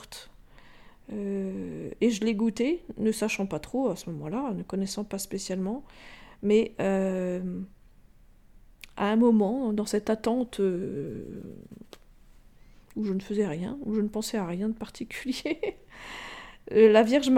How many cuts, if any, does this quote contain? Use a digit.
0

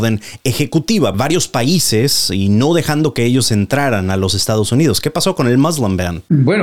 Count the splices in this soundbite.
1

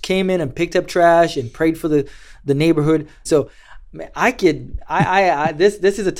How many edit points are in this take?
1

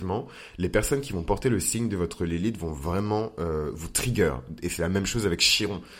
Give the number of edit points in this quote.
0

